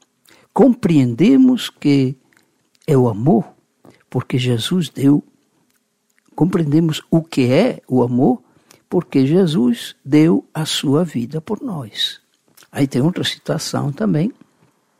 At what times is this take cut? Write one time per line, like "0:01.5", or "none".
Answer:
0:12.6